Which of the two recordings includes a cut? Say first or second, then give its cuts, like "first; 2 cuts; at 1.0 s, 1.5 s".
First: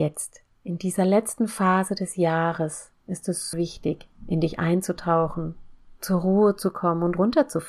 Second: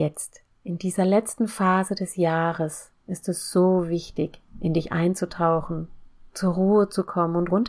first; 1 cut; at 3.5 s